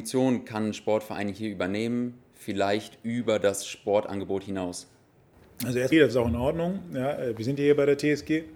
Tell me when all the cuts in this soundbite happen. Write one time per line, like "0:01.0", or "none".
0:05.9